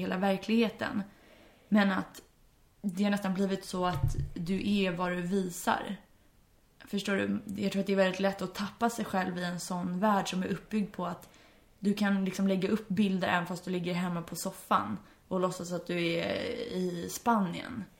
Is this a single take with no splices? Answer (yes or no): yes